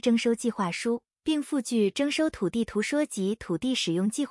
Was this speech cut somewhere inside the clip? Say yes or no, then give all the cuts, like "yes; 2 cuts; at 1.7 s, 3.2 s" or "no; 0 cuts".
no; 0 cuts